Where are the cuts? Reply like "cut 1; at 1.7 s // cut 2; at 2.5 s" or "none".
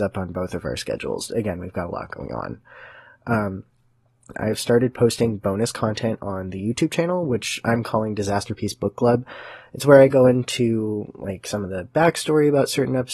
cut 1; at 1.3 s // cut 2; at 4.3 s